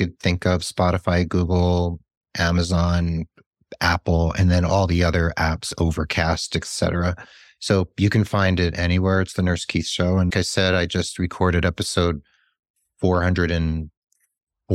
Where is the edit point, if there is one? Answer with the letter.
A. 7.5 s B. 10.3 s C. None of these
B